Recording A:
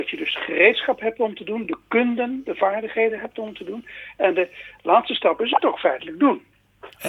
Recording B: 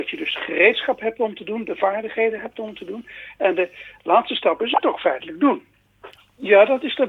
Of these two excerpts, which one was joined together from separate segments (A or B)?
B